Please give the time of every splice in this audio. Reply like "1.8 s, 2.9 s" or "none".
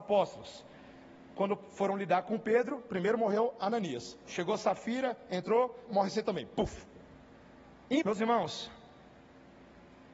5.9 s, 8.0 s